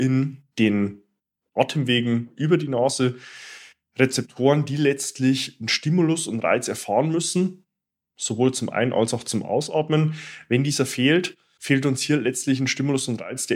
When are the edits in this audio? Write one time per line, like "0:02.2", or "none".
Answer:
none